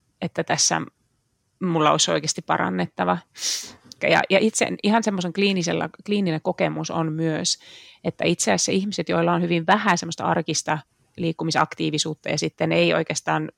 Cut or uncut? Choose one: cut